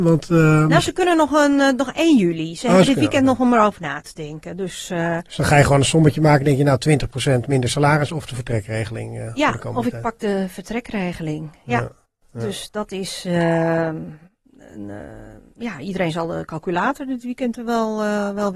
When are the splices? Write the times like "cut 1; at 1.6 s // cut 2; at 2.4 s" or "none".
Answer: none